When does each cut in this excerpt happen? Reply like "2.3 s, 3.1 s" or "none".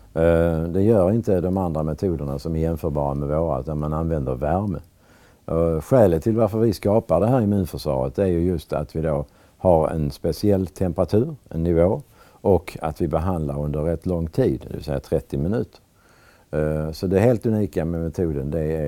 none